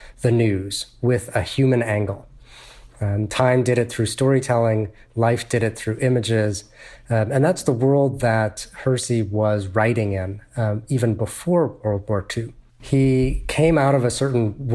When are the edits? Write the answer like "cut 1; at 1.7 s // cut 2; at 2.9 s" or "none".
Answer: cut 1; at 12.7 s